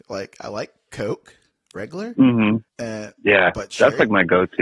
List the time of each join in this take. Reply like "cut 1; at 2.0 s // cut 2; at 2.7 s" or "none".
cut 1; at 2.7 s